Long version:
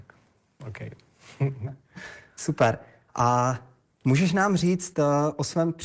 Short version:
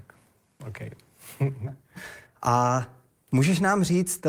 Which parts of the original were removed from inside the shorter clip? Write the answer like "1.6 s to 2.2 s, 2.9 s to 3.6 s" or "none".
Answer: 2.3 s to 3.0 s